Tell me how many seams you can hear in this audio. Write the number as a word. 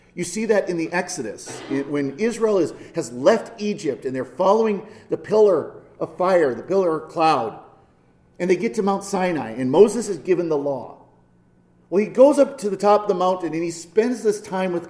zero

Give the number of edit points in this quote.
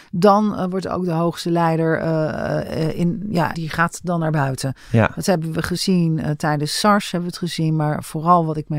one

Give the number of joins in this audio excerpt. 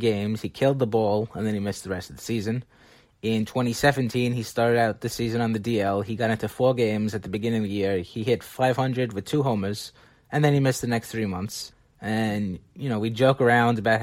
zero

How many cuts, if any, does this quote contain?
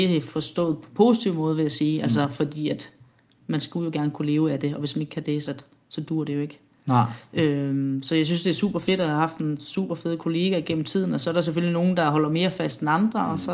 one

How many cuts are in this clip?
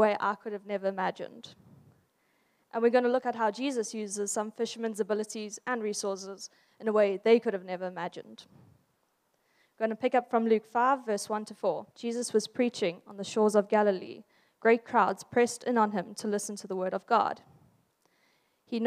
one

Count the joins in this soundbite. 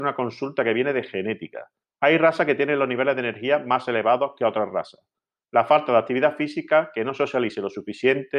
one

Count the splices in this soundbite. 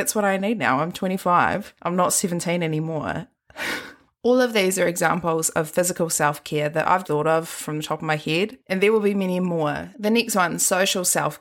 two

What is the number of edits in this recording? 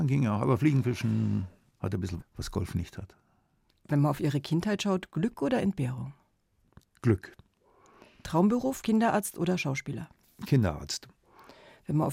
one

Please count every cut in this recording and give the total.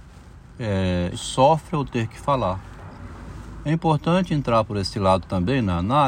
two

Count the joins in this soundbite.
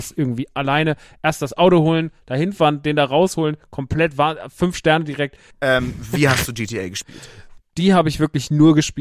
two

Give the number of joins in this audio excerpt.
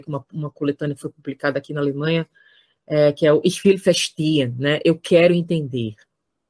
zero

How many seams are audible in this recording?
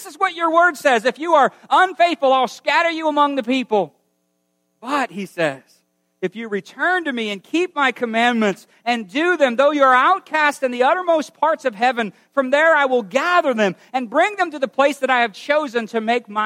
zero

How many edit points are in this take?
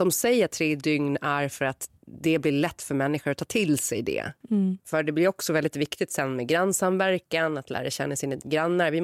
two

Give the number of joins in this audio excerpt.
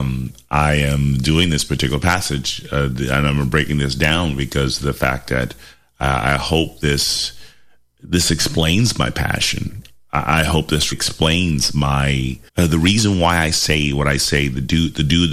two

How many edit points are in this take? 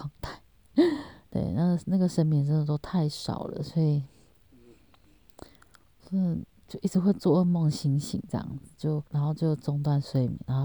one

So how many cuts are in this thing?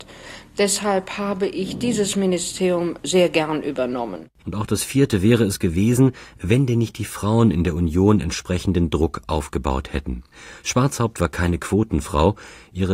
one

